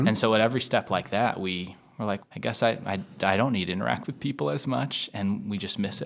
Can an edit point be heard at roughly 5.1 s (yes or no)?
no